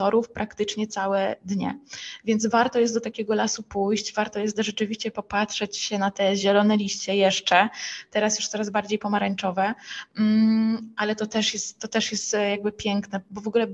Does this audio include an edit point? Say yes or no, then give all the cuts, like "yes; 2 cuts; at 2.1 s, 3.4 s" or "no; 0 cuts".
no; 0 cuts